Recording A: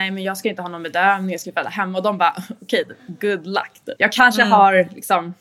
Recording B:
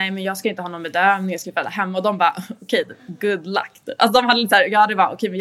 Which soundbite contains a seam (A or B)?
A